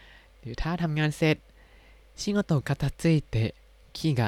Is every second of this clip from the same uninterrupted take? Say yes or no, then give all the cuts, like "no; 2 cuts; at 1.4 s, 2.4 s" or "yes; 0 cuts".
no; 1 cut; at 2.6 s